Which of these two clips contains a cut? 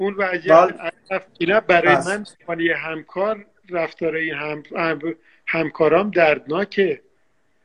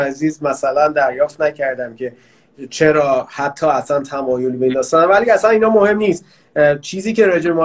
first; 1 cut; at 1.3 s

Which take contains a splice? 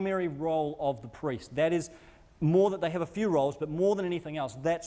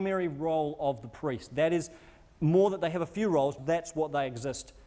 second; 1 cut; at 3.6 s

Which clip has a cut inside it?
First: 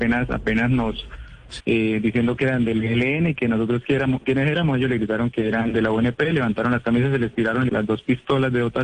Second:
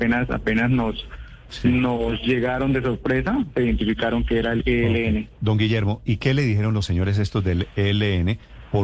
first; 2 cuts; at 1.6 s, 7.7 s

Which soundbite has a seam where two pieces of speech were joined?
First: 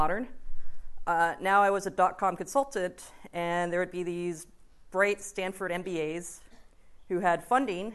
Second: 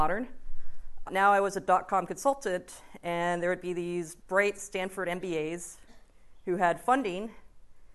second; 2 cuts; at 1.1 s, 4.2 s

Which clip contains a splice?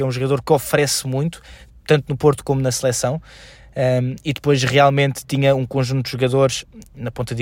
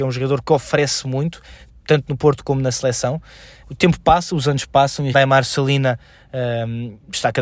second; 2 cuts; at 3.6 s, 5.1 s

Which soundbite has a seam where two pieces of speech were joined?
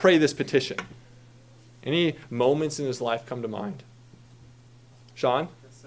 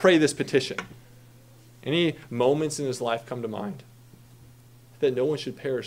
second; 1 cut; at 4.9 s

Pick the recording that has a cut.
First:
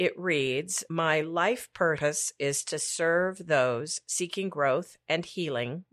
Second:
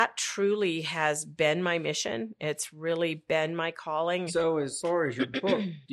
second; 1 cut; at 4.3 s

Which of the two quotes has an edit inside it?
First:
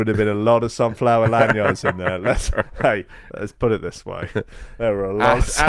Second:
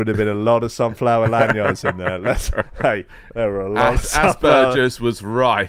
second; 1 cut; at 3.3 s

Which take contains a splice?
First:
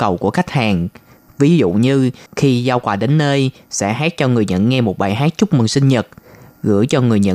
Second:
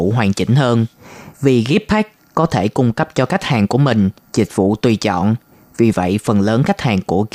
second; 1 cut; at 1.3 s

